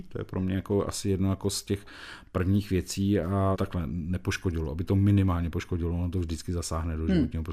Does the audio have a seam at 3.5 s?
yes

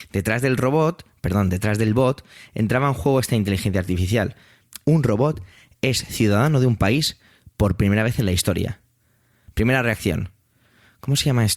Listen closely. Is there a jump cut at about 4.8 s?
yes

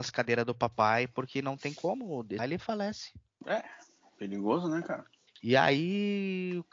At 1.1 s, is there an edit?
no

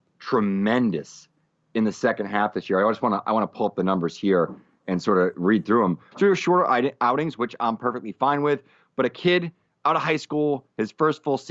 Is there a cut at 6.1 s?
yes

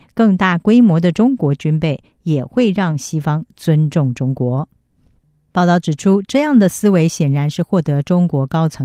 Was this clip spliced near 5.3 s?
no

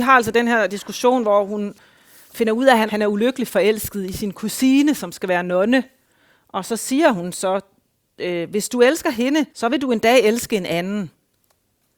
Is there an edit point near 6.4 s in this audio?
no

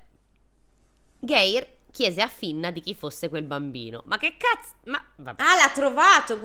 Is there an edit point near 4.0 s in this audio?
no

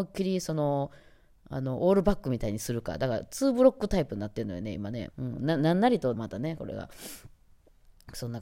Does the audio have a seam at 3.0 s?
no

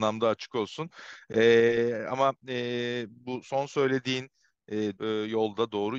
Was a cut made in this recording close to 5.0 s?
yes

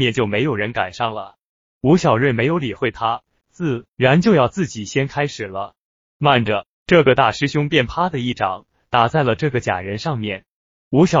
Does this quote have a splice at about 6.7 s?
yes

